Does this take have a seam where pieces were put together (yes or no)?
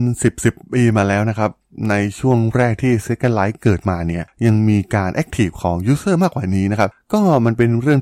no